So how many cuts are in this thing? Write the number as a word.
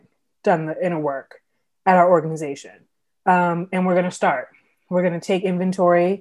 zero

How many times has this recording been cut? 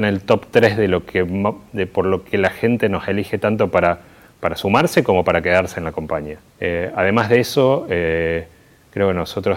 one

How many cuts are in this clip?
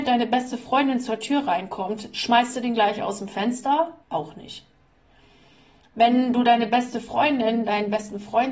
one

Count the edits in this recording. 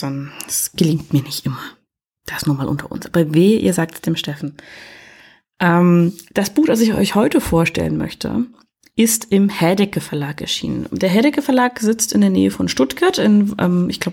zero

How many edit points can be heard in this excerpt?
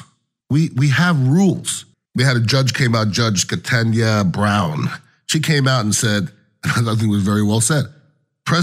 one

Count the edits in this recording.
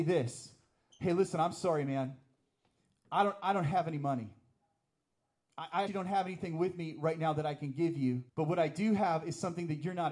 two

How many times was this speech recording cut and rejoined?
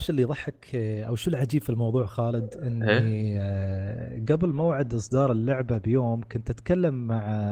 one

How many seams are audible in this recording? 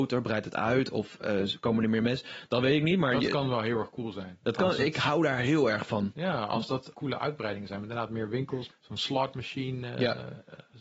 two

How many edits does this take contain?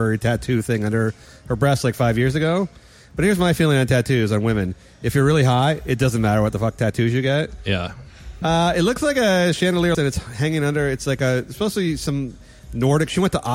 two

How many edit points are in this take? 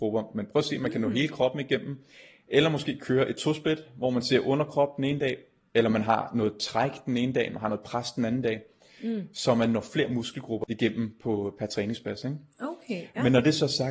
one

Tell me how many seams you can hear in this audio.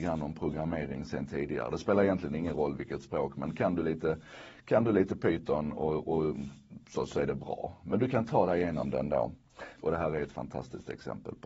one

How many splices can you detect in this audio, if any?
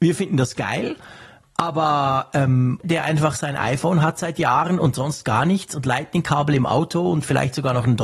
one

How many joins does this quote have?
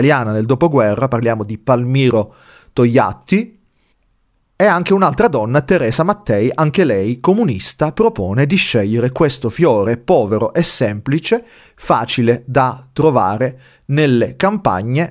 zero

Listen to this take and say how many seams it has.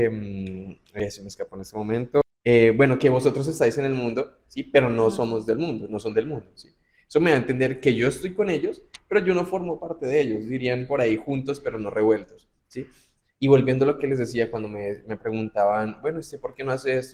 one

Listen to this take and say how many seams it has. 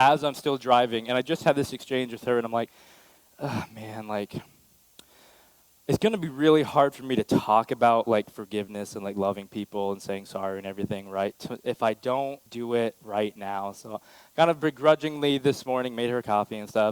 one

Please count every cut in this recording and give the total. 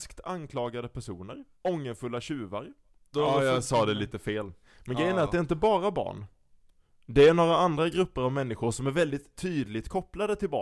two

